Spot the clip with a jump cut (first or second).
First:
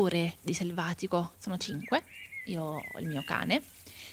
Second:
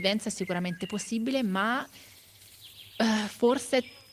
first